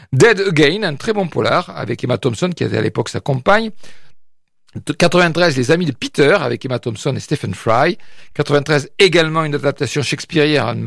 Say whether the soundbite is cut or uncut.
uncut